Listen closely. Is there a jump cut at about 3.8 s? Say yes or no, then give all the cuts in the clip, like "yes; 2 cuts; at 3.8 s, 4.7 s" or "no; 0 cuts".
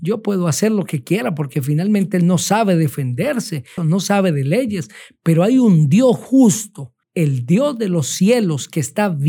yes; 2 cuts; at 3.8 s, 7.0 s